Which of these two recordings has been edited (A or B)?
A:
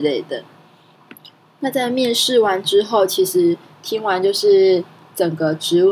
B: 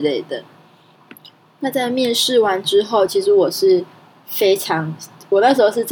B